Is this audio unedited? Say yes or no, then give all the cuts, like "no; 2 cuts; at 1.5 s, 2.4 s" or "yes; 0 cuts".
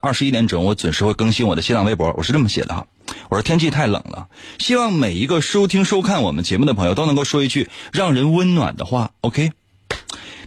yes; 0 cuts